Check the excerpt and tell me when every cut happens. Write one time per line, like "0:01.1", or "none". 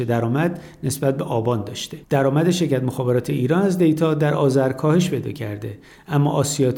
0:02.0